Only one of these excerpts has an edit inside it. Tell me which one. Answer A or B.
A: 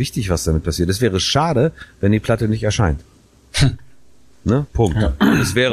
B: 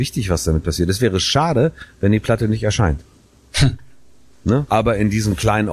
B